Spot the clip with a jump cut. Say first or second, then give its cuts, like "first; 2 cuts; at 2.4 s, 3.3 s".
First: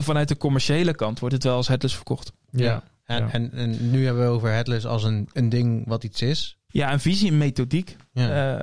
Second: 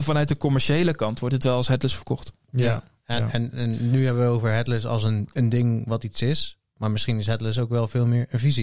first; 1 cut; at 6.7 s